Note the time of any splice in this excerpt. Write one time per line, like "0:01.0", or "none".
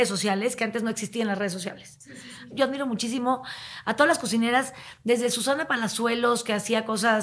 0:02.5

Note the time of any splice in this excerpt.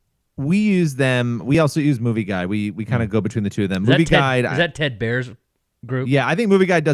none

